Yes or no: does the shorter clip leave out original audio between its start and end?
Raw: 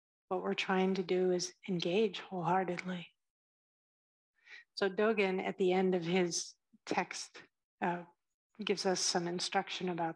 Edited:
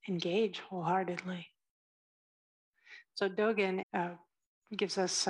yes